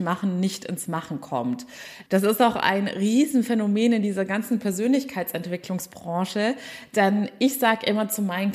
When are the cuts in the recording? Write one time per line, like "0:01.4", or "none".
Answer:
0:02.1

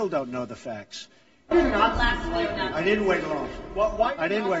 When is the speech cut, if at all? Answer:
0:01.5

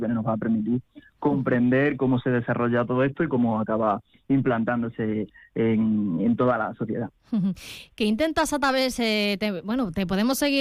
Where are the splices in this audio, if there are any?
none

